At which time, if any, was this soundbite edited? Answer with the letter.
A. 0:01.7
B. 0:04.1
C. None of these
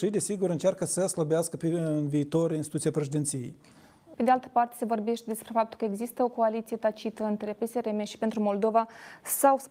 B